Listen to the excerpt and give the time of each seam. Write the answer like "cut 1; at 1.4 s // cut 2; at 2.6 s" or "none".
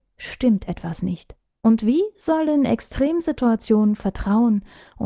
cut 1; at 1.6 s